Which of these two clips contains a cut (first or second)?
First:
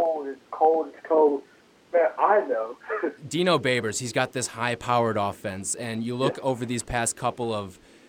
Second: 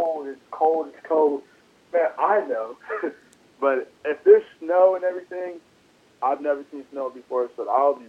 first